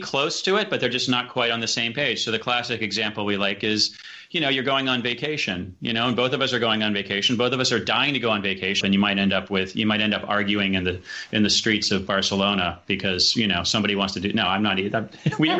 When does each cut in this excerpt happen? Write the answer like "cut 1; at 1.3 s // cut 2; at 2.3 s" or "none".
cut 1; at 8.8 s